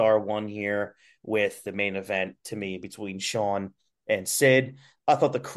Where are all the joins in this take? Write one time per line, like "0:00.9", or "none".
none